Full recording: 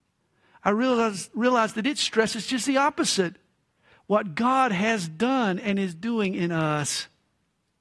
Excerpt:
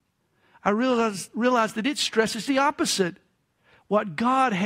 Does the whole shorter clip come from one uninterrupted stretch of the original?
no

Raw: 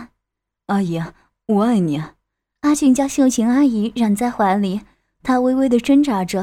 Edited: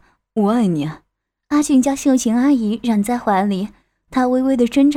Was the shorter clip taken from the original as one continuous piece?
yes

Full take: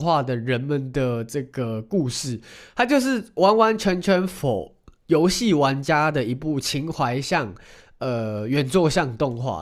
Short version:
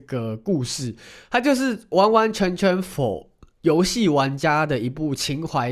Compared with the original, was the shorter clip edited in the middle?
no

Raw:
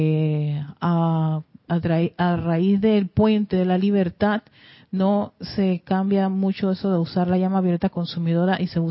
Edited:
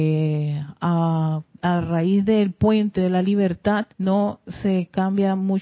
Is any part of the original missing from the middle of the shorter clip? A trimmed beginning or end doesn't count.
yes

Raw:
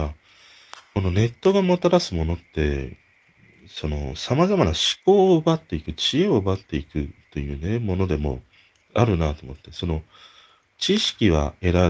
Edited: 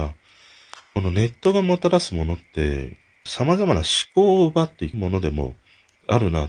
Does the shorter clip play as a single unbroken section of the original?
no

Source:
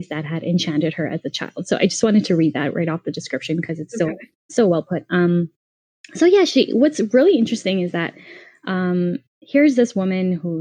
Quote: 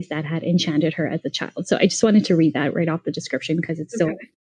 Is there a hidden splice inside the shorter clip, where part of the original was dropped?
no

